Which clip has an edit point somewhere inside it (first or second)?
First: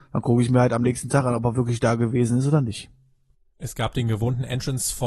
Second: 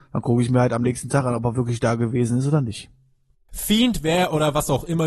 second